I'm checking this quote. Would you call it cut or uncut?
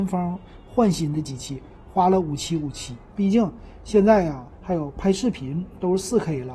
cut